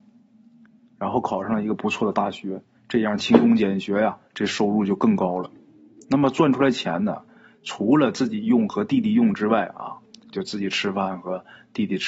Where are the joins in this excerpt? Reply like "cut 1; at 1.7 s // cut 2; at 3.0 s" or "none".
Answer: cut 1; at 6.0 s